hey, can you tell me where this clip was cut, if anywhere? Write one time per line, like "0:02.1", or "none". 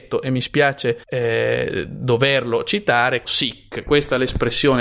0:01.0
0:03.2